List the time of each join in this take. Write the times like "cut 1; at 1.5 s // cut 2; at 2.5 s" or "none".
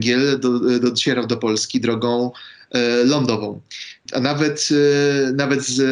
cut 1; at 4.1 s